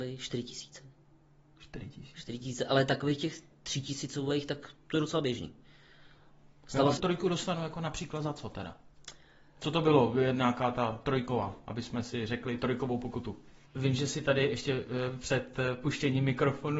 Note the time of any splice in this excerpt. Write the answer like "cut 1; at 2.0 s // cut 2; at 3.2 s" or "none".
cut 1; at 7.0 s // cut 2; at 13.7 s